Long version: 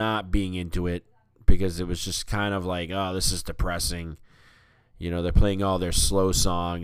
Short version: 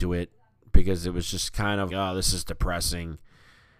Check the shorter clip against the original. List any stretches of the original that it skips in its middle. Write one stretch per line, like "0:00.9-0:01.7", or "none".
0:02.6-0:02.9